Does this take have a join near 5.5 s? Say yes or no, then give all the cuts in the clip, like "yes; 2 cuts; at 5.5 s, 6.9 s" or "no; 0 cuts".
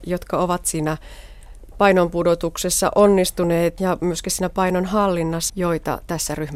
yes; 2 cuts; at 3.8 s, 5.5 s